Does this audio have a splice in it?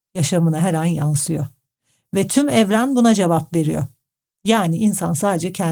no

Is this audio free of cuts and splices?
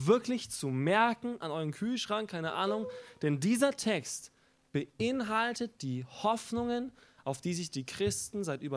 no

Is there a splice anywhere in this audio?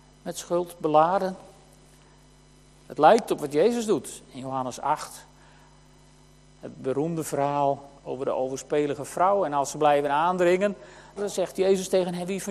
yes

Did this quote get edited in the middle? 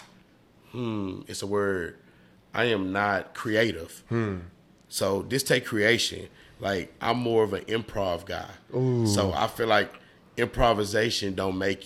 no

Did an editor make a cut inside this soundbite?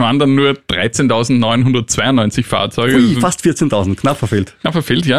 no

